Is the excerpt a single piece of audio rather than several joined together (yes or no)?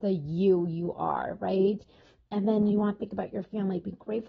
yes